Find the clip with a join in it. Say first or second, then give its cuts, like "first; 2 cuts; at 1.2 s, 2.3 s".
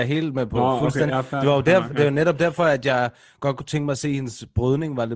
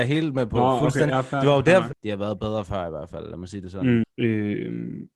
second; 2 cuts; at 1.9 s, 4.0 s